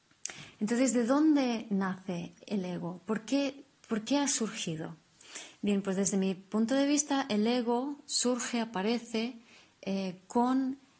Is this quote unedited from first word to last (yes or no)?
yes